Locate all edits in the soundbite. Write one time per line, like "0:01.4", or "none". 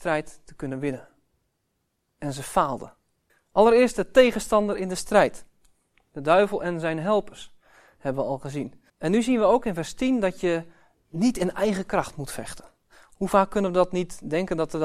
0:03.3
0:08.9